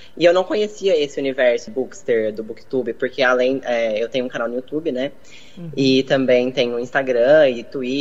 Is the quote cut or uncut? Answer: cut